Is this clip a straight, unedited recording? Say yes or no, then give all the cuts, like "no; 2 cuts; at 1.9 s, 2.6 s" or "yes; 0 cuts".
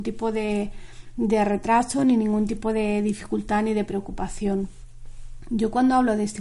yes; 0 cuts